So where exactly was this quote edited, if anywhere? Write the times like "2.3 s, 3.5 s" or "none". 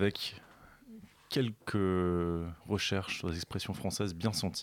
none

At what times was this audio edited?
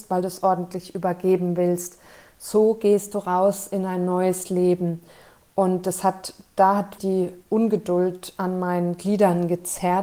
7.0 s

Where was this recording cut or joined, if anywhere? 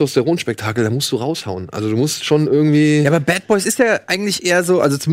none

